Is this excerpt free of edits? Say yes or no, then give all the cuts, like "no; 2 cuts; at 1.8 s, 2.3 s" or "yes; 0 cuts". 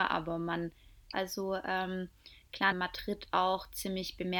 no; 2 cuts; at 1.1 s, 2.7 s